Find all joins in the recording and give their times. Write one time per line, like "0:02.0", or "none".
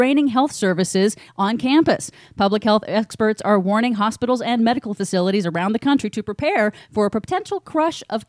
none